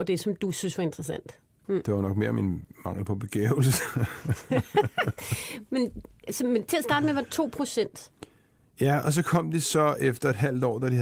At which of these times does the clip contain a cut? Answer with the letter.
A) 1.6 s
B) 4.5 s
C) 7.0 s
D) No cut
A